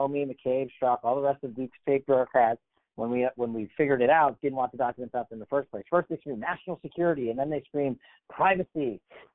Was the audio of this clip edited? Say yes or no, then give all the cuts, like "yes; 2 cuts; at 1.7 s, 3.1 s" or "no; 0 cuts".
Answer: no; 0 cuts